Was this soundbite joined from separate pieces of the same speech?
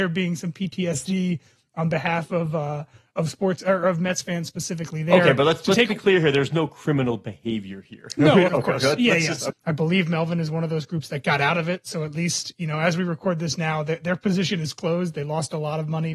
yes; 2 cuts; at 8.5 s, 9.5 s

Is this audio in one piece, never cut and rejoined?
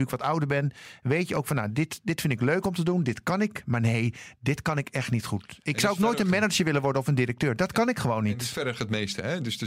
yes; 0 cuts

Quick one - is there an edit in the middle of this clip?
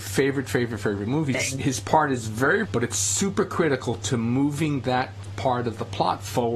yes; 2 cuts; at 1.3 s, 2.7 s

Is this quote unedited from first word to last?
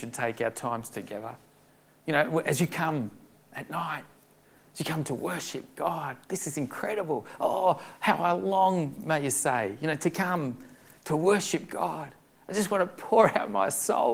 yes; 0 cuts

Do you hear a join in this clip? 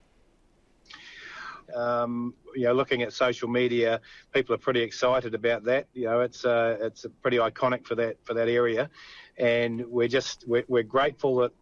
yes; 1 cut; at 1.7 s

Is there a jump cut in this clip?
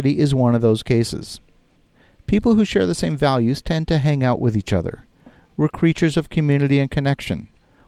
no; 0 cuts

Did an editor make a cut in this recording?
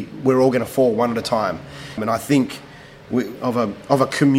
yes; 2 cuts; at 2.0 s, 3.4 s

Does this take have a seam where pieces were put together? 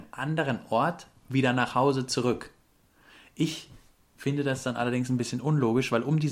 yes; 1 cut; at 1.2 s

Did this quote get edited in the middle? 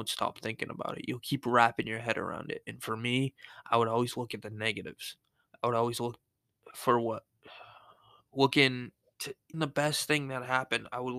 yes; 1 cut; at 9.5 s

